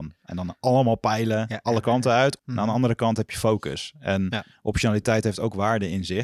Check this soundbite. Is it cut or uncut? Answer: cut